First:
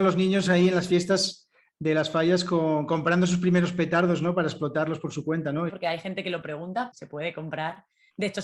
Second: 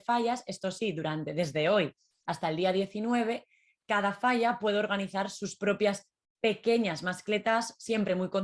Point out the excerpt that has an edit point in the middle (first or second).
first